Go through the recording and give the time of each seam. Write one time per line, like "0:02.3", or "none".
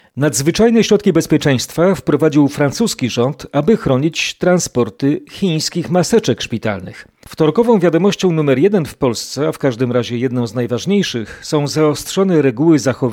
0:07.2